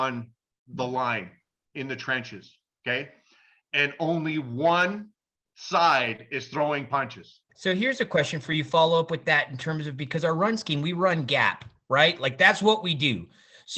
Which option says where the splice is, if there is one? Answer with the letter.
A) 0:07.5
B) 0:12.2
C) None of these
A